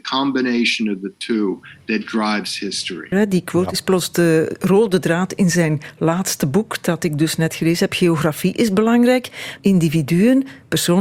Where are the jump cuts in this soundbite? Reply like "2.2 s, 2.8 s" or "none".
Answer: 3.1 s, 9.6 s